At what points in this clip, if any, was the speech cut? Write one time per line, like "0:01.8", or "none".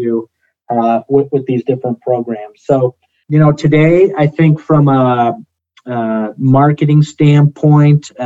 0:03.2